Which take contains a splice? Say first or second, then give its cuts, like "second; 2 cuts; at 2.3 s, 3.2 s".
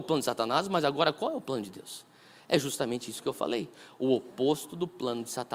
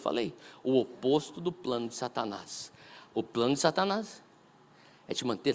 second; 1 cut; at 3.1 s